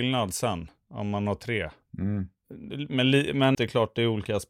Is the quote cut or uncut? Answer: cut